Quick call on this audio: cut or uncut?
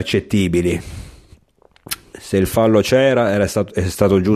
cut